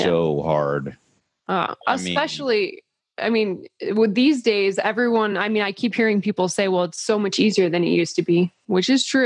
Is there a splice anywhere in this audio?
no; 0 cuts

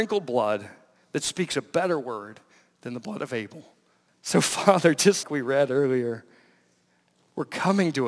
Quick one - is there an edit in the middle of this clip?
yes; 2 cuts; at 4.1 s, 5.2 s

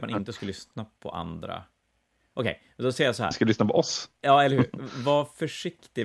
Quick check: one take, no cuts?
yes; 0 cuts

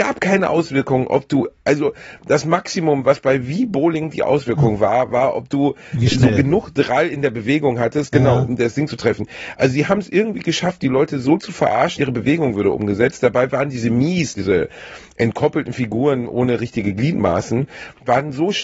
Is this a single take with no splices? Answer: no; 2 cuts; at 12.0 s, 14.4 s

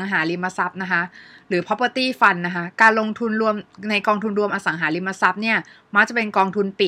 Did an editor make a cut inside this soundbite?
no; 0 cuts

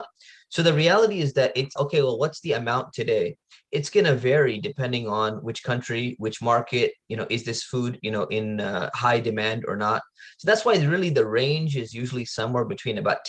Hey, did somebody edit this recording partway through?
yes; 1 cut; at 1.8 s

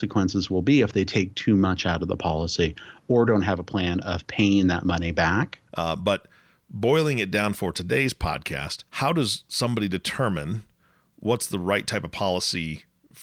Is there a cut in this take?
yes; 2 cuts; at 5.7 s, 8.9 s

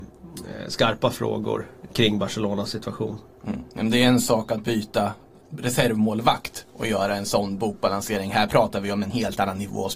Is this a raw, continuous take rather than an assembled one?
yes; 0 cuts

